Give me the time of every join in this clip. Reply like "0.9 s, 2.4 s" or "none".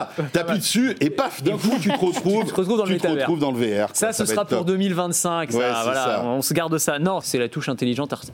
7.2 s